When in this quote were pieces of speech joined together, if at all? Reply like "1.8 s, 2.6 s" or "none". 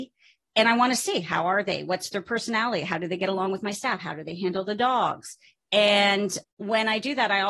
none

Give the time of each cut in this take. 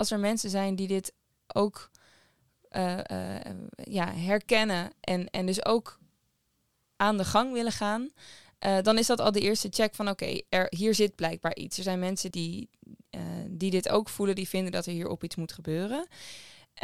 12.3 s

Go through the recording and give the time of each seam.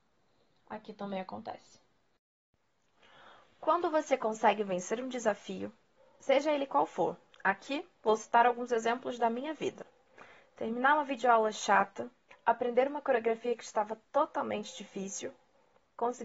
12.3 s

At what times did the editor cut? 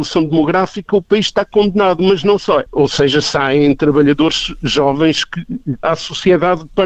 2.7 s, 5.8 s

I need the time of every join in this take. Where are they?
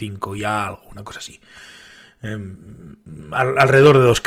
none

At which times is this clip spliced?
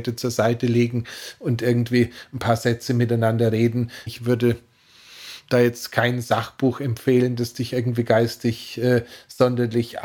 4.1 s

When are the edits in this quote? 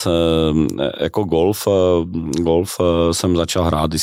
none

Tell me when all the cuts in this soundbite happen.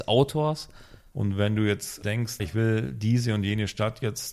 1.1 s, 2.4 s

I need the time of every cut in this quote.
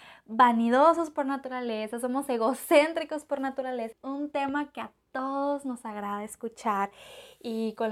3.9 s

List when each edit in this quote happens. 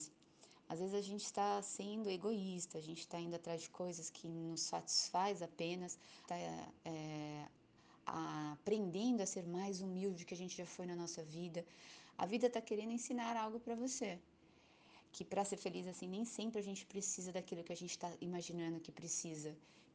6.3 s

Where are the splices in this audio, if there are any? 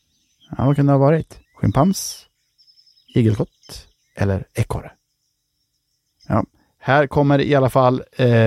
1.4 s

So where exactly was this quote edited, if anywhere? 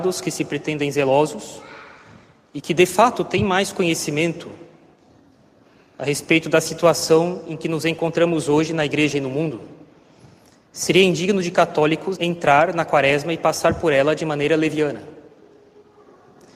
12.2 s

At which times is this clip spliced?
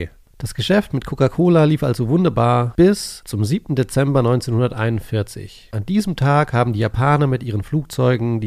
none

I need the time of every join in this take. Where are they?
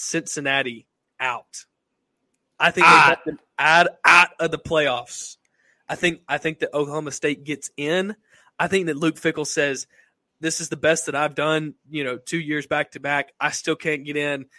none

